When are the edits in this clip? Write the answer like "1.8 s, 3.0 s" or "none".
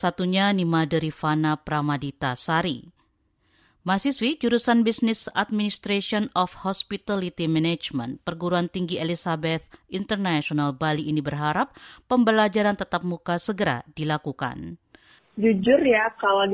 none